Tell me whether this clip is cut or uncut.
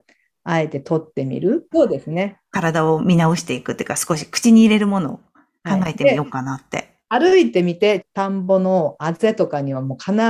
cut